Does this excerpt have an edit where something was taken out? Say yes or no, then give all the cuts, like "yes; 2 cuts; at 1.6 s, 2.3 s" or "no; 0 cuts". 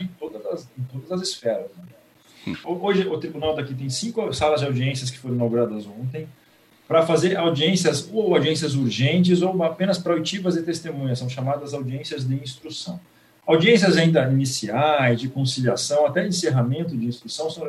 yes; 1 cut; at 2.6 s